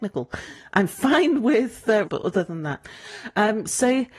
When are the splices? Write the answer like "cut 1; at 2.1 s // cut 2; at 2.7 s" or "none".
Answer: cut 1; at 2.0 s